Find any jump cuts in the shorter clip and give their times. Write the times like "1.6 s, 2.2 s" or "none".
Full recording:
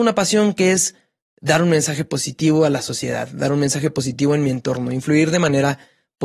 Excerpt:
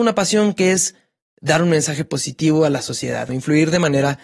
3.3 s